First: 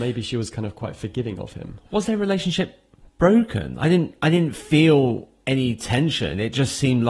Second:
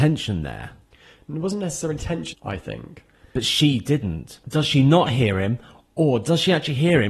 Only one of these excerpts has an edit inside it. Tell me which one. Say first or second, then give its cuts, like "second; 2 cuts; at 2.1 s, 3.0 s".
second; 2 cuts; at 2.3 s, 4.4 s